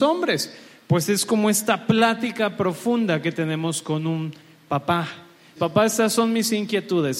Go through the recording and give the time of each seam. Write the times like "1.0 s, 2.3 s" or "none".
5.6 s